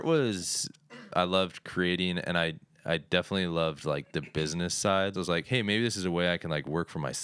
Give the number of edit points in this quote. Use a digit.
2